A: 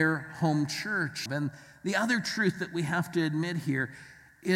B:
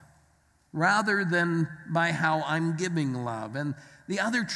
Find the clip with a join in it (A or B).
A